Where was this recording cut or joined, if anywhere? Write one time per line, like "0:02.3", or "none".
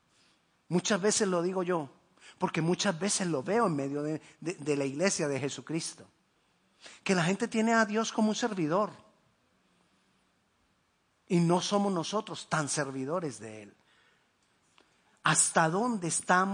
none